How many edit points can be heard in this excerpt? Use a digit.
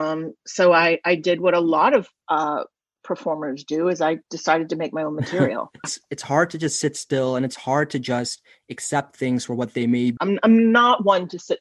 2